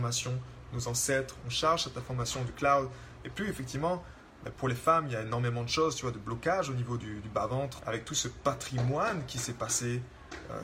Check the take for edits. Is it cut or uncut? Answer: cut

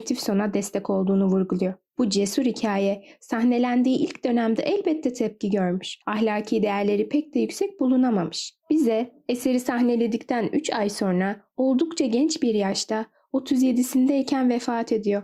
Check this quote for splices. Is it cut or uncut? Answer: uncut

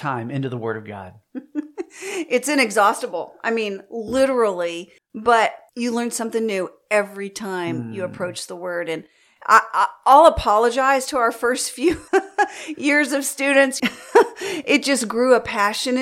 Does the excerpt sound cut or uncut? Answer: cut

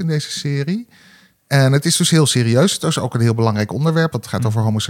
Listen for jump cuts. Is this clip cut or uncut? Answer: uncut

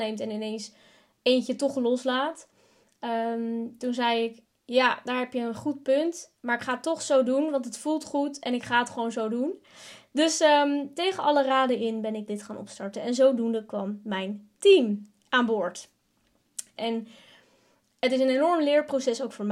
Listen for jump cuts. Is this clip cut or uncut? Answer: cut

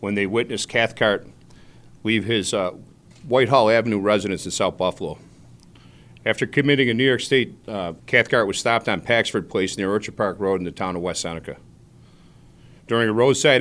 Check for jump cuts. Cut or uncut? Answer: cut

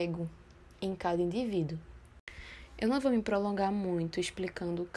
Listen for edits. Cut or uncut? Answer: uncut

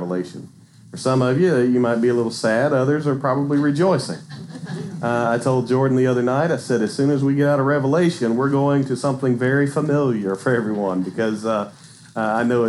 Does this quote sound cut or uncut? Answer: uncut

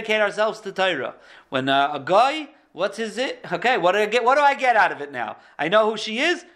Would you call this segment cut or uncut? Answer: uncut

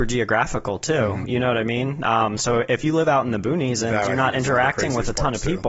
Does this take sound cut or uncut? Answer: uncut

